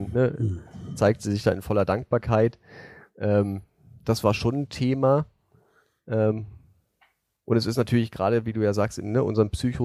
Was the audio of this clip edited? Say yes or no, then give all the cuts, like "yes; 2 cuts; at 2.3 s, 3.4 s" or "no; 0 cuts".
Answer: no; 0 cuts